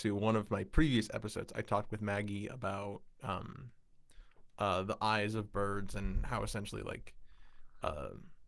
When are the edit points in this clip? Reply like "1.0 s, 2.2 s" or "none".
none